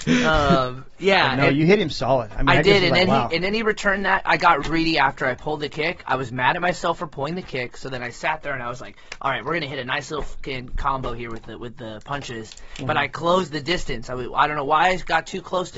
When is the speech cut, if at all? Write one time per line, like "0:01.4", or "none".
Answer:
0:04.6